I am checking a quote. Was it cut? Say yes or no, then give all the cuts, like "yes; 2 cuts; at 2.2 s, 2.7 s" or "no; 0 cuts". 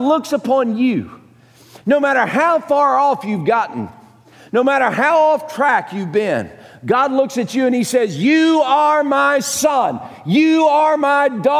no; 0 cuts